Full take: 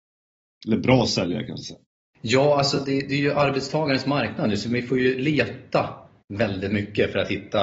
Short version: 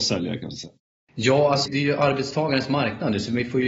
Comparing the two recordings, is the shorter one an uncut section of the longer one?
no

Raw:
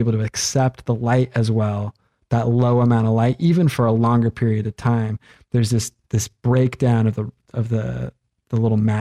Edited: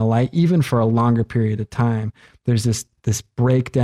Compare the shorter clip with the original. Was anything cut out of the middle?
no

